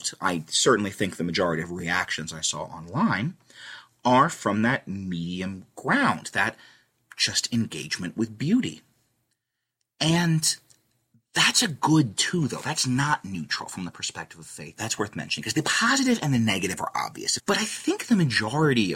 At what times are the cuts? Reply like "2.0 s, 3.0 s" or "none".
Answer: 14.8 s, 17.4 s